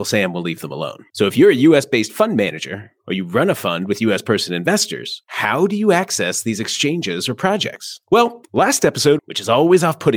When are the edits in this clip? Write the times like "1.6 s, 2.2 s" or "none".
9.2 s